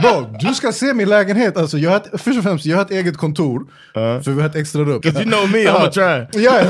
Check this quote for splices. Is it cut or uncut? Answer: cut